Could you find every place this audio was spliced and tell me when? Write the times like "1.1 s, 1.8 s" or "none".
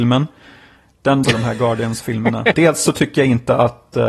1.2 s, 2.5 s